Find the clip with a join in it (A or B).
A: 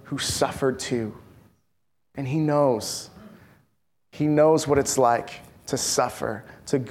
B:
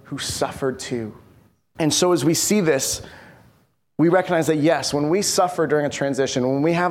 B